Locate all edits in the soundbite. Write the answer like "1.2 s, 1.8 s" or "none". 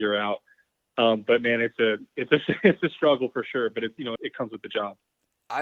4.2 s